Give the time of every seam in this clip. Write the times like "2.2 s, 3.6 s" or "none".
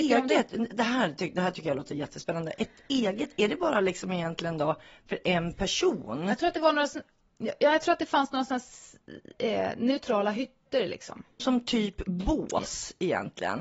11.4 s